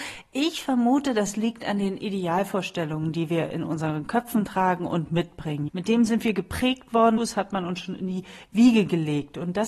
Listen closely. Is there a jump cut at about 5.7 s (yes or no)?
yes